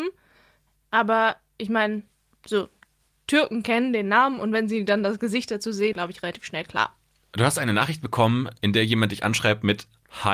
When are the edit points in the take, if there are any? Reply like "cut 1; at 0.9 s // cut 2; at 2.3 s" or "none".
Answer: cut 1; at 5.9 s

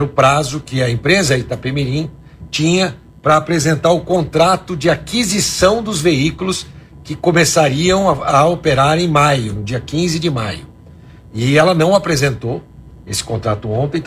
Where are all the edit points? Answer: none

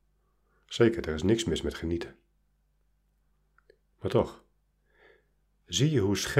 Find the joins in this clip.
none

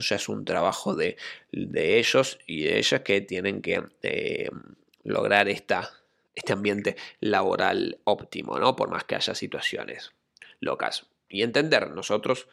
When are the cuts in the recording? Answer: none

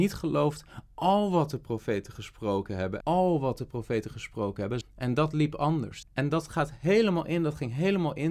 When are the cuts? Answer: cut 1; at 3.0 s // cut 2; at 4.8 s // cut 3; at 6.0 s

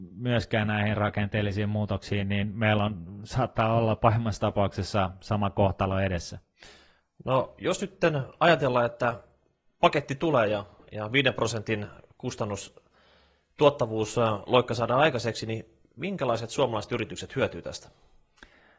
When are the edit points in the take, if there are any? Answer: none

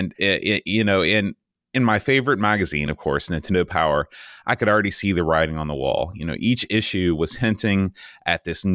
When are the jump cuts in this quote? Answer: none

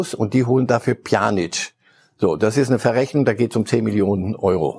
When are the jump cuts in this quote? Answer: none

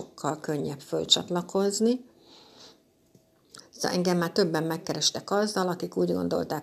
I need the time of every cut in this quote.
cut 1; at 3.6 s

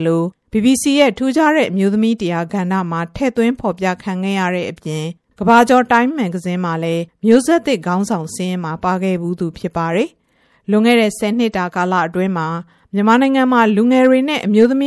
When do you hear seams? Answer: none

